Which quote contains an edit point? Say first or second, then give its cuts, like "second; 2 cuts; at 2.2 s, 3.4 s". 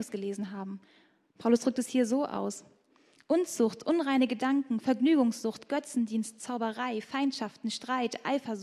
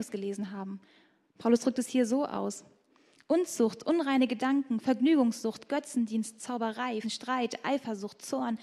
second; 1 cut; at 7.0 s